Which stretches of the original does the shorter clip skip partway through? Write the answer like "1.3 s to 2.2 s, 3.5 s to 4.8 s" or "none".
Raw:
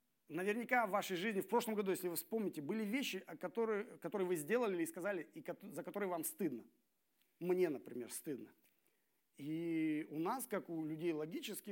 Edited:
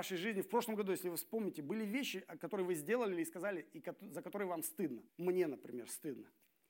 3.4 s to 4.0 s, 6.7 s to 7.3 s